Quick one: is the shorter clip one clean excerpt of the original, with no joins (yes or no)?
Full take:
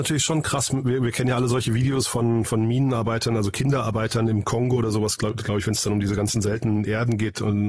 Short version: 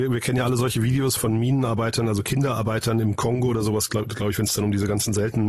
no